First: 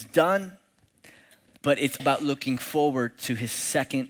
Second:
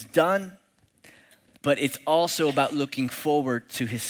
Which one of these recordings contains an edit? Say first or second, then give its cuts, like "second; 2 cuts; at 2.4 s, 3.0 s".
first; 1 cut; at 2.0 s